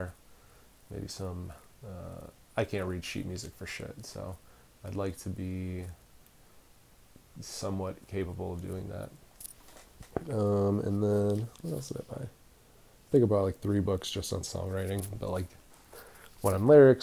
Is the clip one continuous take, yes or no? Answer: yes